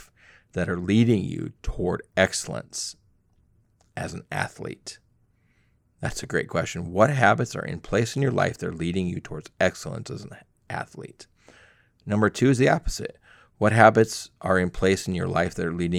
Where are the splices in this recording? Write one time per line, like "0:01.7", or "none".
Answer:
none